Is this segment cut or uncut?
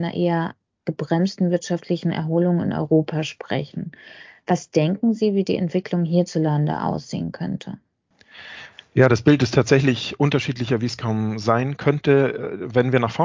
uncut